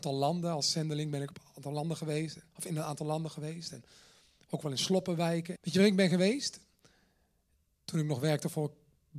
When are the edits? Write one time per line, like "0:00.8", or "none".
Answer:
0:05.6
0:07.8